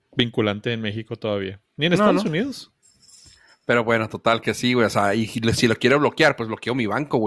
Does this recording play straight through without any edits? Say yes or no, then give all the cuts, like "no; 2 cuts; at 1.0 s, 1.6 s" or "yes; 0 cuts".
yes; 0 cuts